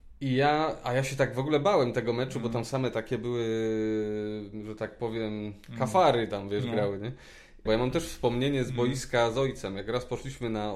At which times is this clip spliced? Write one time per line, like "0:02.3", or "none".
0:07.7